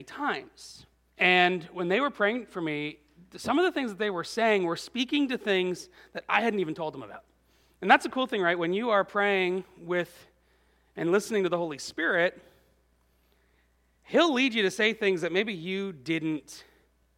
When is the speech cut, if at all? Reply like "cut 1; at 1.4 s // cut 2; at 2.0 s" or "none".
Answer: cut 1; at 1.1 s